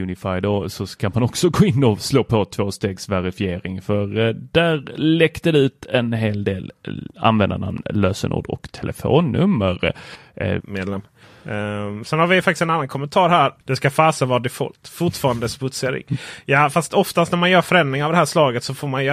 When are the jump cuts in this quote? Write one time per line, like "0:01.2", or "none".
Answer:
0:10.6
0:13.6